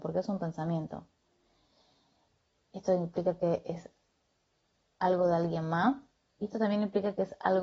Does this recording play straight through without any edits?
yes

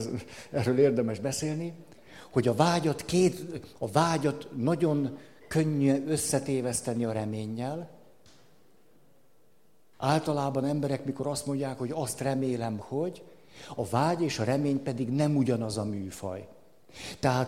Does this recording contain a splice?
yes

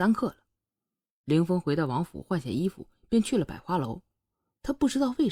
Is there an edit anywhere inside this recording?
no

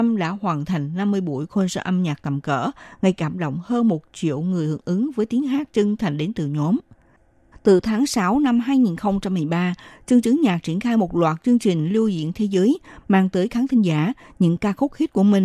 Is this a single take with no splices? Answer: no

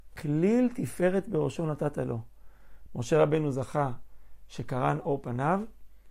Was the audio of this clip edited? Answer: no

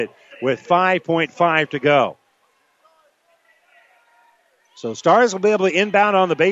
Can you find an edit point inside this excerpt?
no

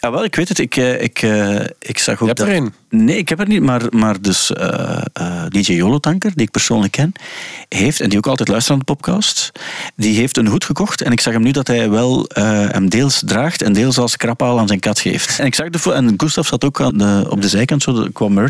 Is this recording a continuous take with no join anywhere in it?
no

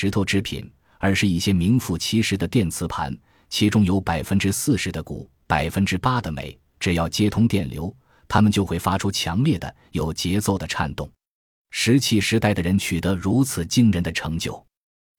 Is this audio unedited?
yes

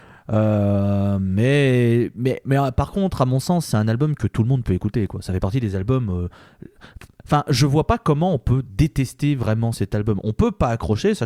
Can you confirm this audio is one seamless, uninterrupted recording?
yes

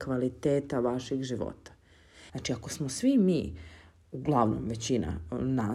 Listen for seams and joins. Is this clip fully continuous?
no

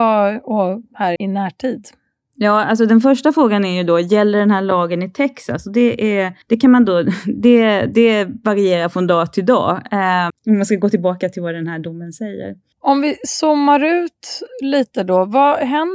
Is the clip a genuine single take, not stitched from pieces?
no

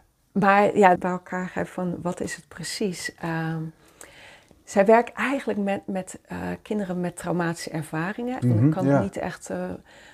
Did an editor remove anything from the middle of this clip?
yes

